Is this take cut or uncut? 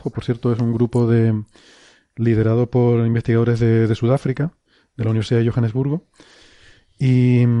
uncut